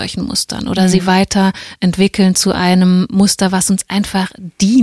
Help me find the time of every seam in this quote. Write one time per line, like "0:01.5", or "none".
none